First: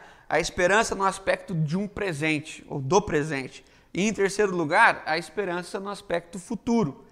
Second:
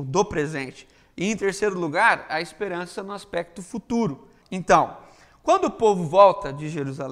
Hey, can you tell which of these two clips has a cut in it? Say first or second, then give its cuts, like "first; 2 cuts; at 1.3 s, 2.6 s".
second; 1 cut; at 4.4 s